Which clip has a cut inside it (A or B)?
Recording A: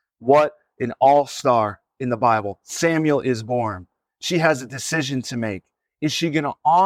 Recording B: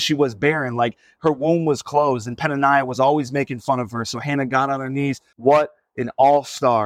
B